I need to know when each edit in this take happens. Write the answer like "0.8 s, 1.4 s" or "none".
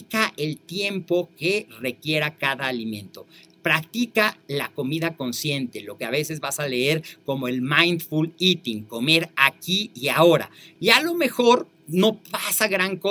10.8 s